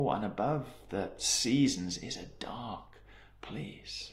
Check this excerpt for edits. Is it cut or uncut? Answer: uncut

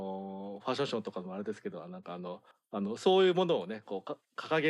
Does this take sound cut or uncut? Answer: uncut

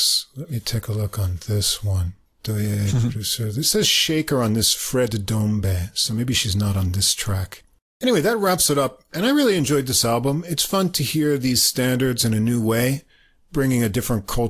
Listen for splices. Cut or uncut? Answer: uncut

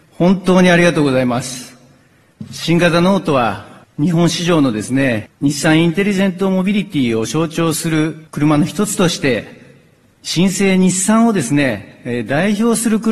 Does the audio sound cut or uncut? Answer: cut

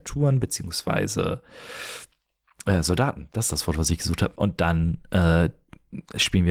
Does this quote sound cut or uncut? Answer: cut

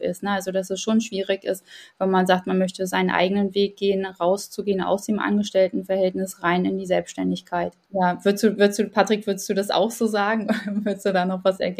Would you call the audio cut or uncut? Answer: uncut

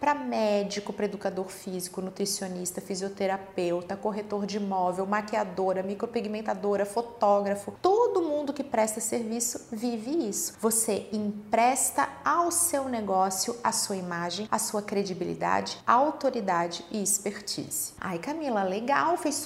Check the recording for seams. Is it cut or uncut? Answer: uncut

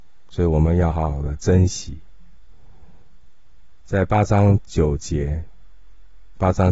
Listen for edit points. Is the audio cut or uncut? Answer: uncut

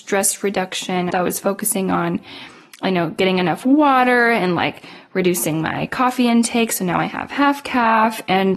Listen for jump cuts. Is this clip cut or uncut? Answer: cut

